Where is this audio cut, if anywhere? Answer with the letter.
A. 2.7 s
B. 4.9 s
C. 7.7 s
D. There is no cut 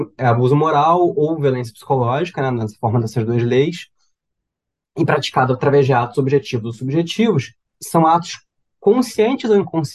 C